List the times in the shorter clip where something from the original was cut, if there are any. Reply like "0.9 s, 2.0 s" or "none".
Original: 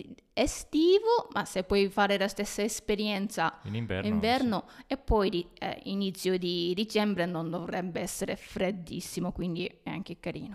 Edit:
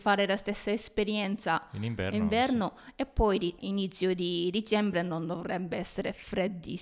3.6 s